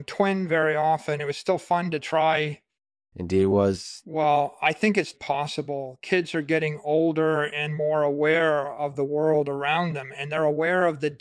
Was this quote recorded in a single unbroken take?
no; 2 cuts; at 4.0 s, 5.1 s

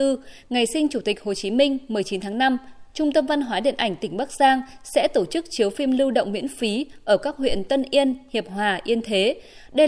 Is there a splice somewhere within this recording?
yes; 1 cut; at 2.9 s

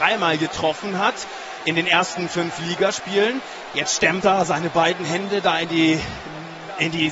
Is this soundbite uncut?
yes; 0 cuts

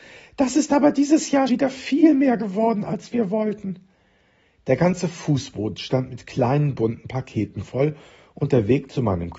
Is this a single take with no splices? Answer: no; 1 cut; at 1.5 s

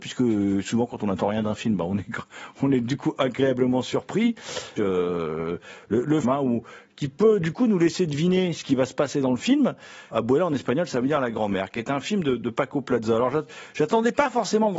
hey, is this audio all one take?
no; 3 cuts; at 4.8 s, 6.2 s, 10.1 s

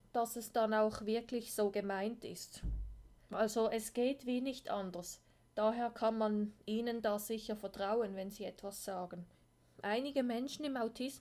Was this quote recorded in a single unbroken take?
no; 1 cut; at 3.2 s

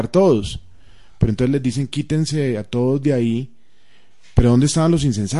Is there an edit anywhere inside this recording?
no; 0 cuts

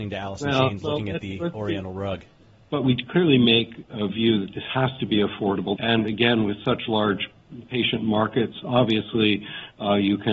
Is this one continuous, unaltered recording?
no; 2 cuts; at 2.7 s, 5.8 s

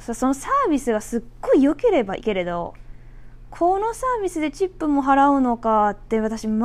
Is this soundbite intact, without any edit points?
no; 1 cut; at 2.2 s

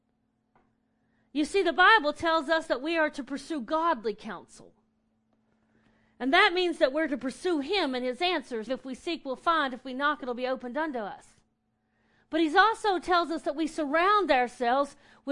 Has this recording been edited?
yes; 1 cut; at 8.7 s

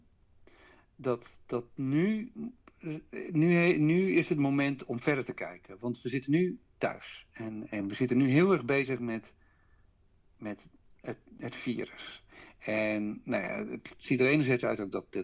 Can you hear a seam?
no; 0 cuts

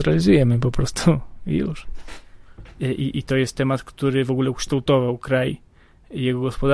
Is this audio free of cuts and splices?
no; 1 cut; at 2.7 s

